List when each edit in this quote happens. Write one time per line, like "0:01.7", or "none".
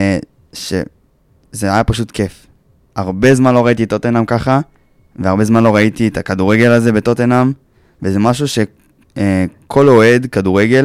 none